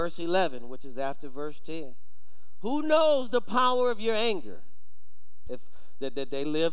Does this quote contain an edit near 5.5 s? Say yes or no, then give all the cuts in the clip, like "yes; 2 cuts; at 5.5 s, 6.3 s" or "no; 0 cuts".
yes; 1 cut; at 5.5 s